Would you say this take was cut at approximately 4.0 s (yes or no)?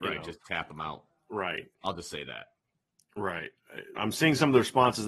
yes